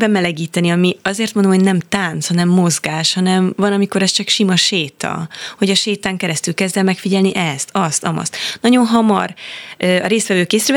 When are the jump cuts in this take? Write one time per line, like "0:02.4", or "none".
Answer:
none